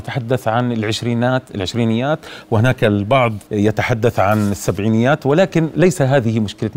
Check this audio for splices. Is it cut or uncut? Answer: cut